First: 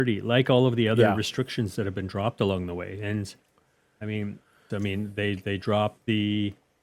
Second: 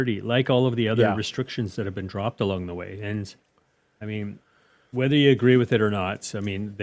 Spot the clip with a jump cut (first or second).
first